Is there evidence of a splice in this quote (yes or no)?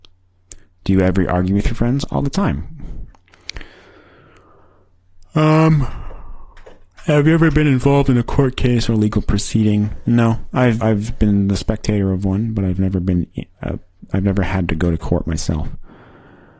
yes